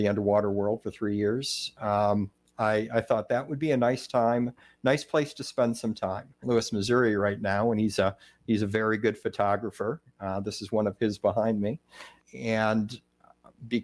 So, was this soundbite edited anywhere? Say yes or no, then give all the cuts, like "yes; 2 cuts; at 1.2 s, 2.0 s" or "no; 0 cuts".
yes; 2 cuts; at 6.4 s, 12.2 s